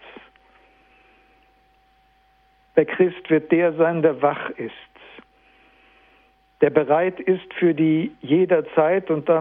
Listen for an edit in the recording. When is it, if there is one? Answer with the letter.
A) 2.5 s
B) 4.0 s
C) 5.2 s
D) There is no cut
D